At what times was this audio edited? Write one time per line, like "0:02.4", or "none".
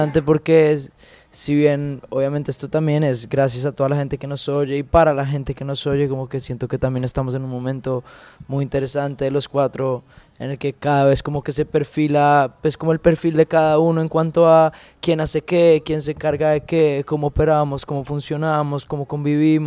none